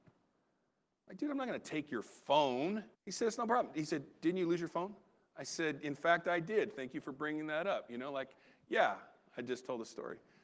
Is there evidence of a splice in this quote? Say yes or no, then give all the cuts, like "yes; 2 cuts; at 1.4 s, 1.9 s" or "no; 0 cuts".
yes; 1 cut; at 2.9 s